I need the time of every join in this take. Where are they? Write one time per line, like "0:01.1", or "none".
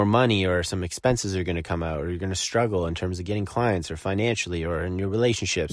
none